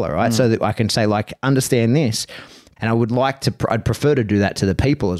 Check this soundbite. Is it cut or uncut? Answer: cut